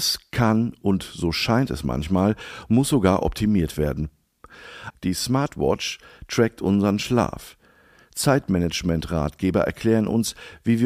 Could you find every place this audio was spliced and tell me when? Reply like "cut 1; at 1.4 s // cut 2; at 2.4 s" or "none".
cut 1; at 4.9 s